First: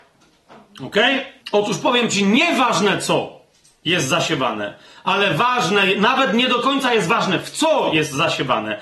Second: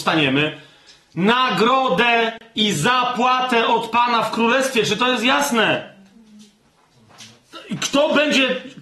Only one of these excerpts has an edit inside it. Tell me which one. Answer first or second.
first